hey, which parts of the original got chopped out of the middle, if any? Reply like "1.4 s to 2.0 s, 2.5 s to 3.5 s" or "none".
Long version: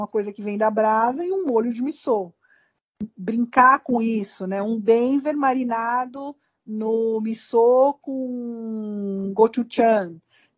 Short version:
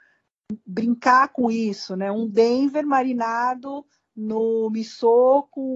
none